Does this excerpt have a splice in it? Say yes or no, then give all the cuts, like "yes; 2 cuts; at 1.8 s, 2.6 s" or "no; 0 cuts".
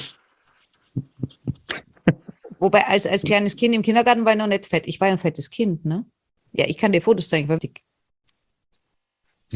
yes; 2 cuts; at 6.4 s, 7.6 s